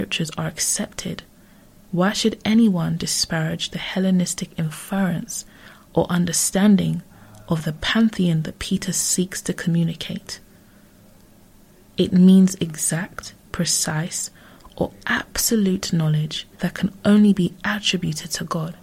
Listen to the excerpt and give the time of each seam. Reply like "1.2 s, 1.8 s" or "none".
11.8 s, 16.5 s